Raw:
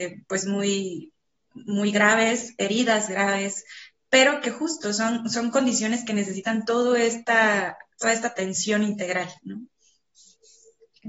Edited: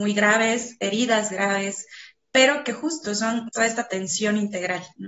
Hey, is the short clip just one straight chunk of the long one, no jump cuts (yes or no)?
no